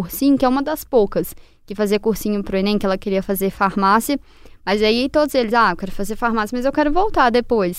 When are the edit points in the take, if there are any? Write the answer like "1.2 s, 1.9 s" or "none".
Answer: none